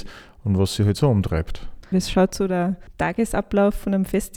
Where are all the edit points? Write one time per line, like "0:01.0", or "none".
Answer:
0:01.9